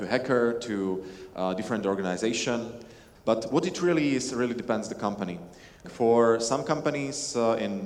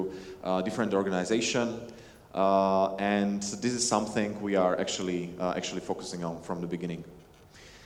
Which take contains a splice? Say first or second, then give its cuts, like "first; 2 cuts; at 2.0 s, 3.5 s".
first; 2 cuts; at 3.2 s, 5.8 s